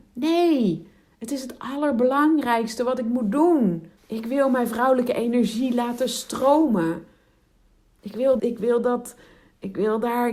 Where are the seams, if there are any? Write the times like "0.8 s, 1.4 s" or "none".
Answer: 4.0 s, 8.4 s